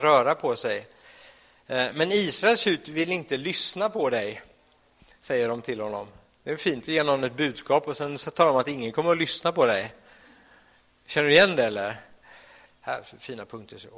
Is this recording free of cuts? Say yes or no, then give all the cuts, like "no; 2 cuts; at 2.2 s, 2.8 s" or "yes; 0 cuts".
no; 1 cut; at 12.7 s